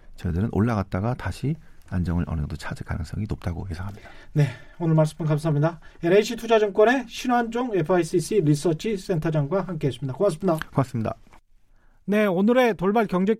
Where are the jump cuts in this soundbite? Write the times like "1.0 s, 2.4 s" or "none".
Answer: none